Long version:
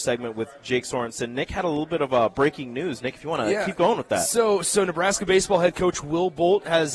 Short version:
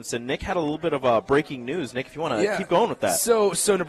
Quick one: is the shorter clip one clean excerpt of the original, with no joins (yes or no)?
yes